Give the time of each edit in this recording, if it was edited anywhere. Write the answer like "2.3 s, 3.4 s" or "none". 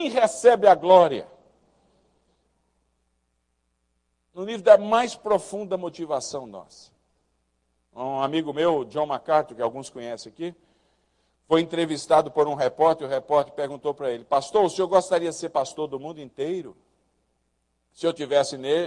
none